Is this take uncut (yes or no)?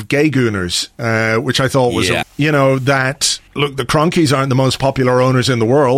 no